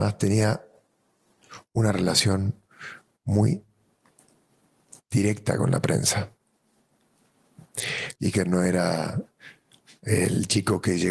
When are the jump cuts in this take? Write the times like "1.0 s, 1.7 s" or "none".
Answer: 8.1 s